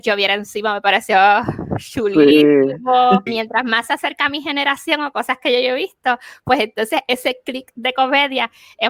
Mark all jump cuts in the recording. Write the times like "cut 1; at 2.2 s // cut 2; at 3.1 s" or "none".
cut 1; at 3.3 s